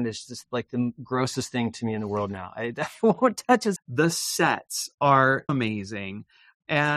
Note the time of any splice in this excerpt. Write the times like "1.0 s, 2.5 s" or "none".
3.8 s, 5.5 s